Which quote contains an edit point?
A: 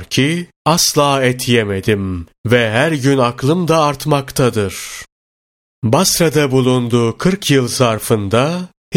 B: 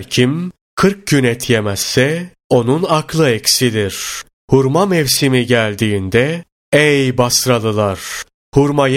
B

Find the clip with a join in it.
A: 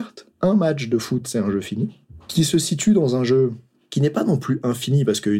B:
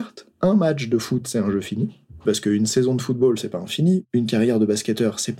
B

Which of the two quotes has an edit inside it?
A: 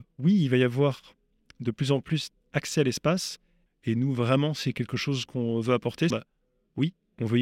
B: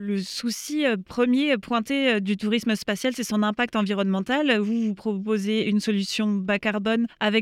A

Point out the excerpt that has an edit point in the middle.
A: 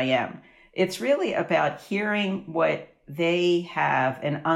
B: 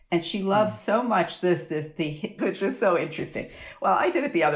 B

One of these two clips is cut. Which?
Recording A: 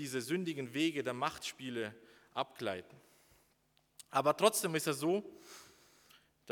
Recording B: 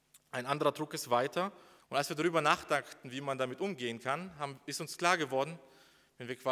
B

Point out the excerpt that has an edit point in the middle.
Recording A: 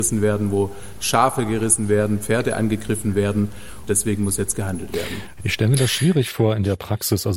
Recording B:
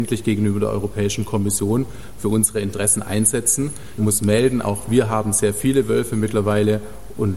A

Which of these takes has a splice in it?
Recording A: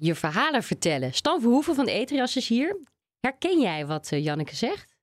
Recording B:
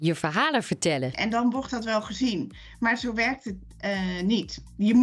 B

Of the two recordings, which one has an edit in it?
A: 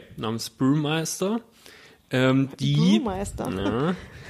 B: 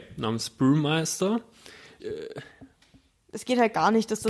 B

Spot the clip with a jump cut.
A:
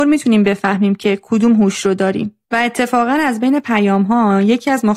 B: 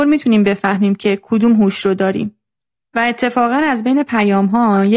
A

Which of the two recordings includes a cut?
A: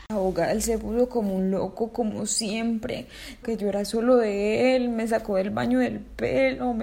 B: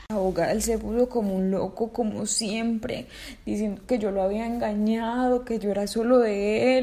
A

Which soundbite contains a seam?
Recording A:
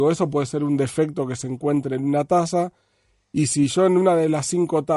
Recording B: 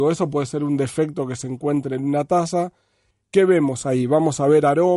B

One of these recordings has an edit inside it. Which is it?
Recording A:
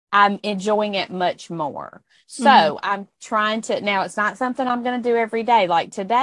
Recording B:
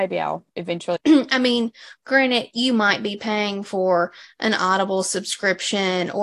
B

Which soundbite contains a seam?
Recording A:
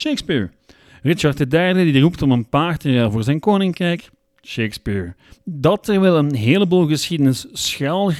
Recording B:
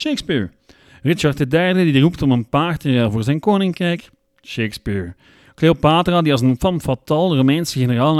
A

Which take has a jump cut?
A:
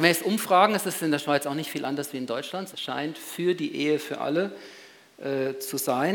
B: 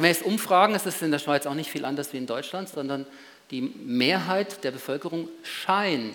A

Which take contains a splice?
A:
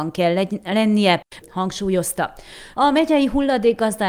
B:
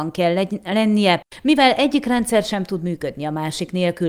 A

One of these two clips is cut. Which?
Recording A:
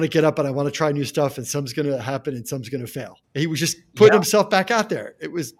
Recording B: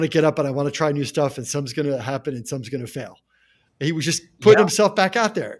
A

